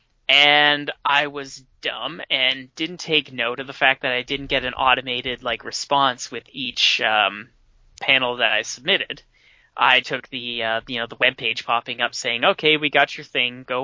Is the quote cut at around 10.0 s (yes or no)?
yes